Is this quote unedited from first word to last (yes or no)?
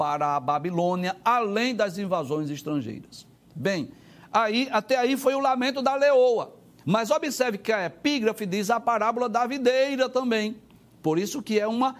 yes